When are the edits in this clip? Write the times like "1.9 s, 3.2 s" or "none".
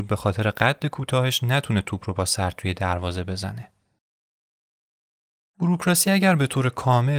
none